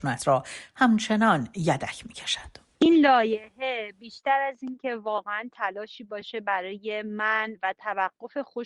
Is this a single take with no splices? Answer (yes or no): yes